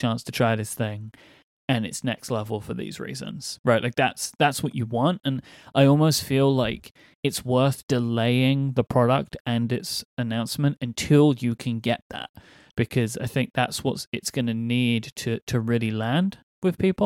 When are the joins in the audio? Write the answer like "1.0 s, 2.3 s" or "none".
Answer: 7.8 s